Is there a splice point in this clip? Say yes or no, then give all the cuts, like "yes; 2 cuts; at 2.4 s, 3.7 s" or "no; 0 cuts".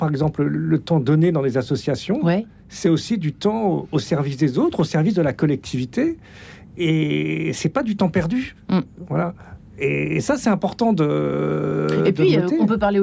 no; 0 cuts